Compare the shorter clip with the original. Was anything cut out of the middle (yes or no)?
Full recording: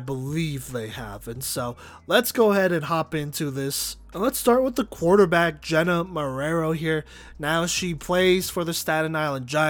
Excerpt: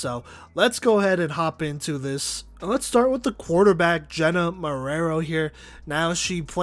no